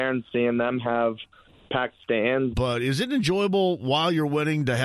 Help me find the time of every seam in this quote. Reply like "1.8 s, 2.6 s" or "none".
2.5 s